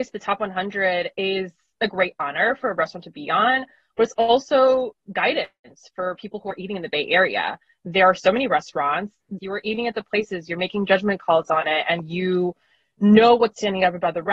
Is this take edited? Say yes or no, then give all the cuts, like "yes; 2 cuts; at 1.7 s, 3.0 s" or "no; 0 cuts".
yes; 1 cut; at 9.4 s